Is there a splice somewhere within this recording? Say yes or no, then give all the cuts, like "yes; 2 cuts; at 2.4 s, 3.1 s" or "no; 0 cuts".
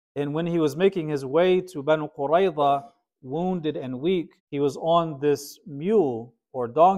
yes; 1 cut; at 4.4 s